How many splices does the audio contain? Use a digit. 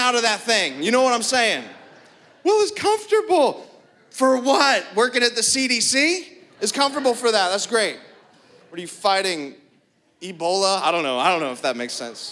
0